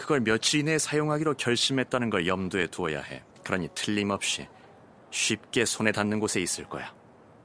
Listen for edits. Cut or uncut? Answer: cut